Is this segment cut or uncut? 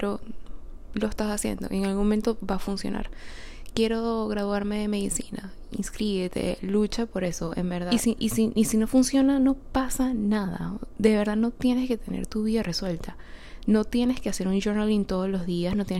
uncut